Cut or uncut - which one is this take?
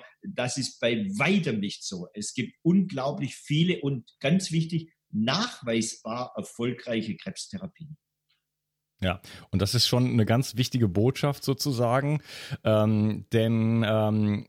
uncut